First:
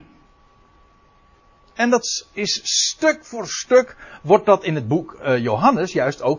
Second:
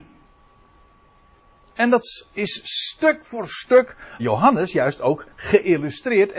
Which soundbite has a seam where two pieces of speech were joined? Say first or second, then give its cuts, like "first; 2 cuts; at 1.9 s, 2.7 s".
second; 1 cut; at 4.2 s